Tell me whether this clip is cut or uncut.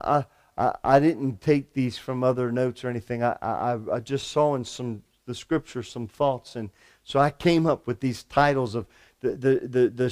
uncut